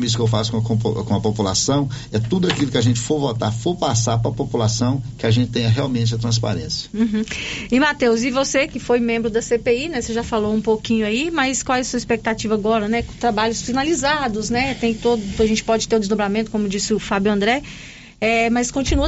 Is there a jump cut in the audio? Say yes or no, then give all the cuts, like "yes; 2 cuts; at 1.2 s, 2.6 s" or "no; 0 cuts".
no; 0 cuts